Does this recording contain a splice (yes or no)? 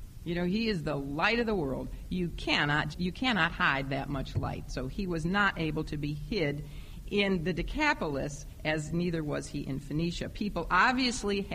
yes